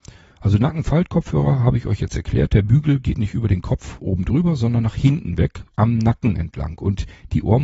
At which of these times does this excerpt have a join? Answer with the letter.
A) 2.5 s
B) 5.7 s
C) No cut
B